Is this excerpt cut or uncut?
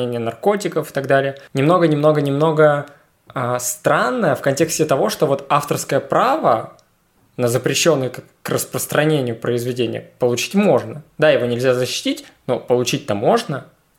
uncut